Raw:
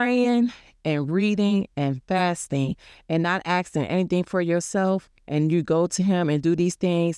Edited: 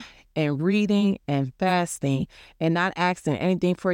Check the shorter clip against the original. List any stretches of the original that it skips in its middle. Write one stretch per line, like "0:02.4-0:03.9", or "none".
none

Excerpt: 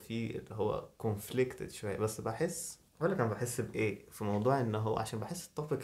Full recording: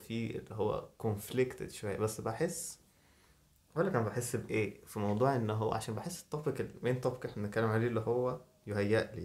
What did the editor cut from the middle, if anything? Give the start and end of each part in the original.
0:02.9-0:03.6

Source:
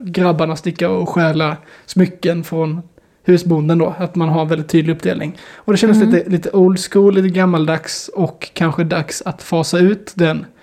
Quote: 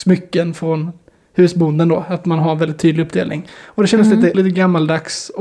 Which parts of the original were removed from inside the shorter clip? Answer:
0:06.2-0:07.1

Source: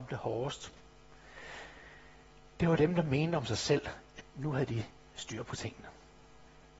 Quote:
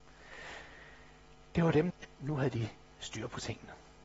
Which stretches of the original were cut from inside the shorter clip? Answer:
0:02.9-0:04.1

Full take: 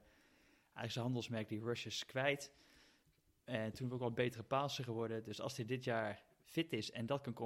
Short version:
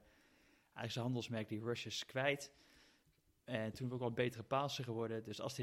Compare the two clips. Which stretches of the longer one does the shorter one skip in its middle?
none

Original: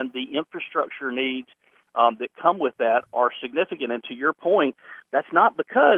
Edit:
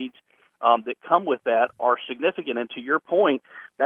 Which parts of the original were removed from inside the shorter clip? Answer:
none

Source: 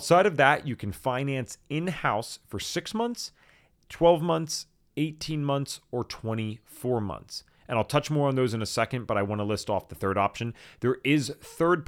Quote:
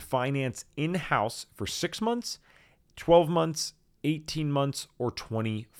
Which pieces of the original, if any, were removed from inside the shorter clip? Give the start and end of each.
none

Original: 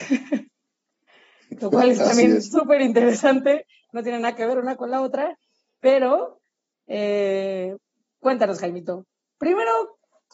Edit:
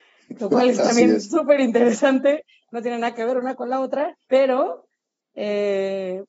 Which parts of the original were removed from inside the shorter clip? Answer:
0:05.5-0:05.8

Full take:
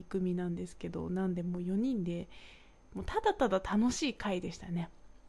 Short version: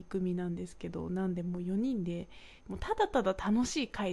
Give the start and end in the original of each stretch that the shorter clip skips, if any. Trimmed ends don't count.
0:02.6-0:02.8

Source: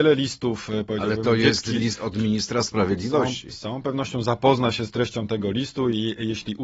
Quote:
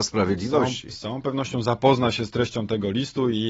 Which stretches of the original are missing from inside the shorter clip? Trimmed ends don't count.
none

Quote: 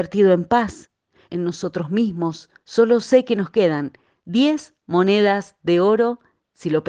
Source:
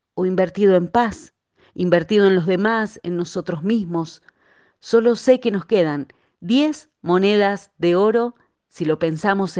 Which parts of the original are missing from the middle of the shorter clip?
0:01.7-0:03.0
0:04.3-0:04.8

